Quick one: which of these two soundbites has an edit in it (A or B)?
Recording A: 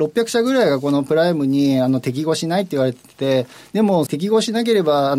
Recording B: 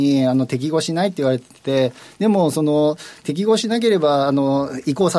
A